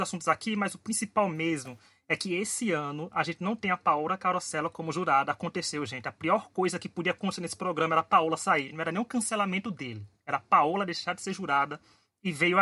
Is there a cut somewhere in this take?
no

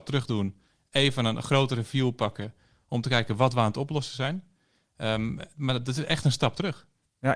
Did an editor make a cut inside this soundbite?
no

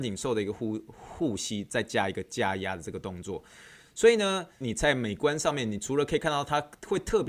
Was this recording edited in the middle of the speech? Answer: yes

